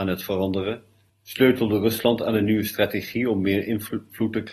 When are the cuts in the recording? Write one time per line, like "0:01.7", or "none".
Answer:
0:01.1